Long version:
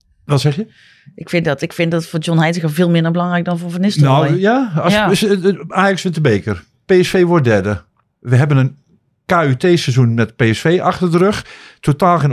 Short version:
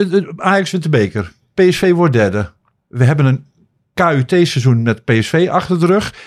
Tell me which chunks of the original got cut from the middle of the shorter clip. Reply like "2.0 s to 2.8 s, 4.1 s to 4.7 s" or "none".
none